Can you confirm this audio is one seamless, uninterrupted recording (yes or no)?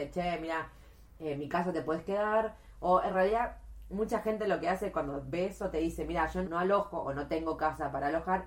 no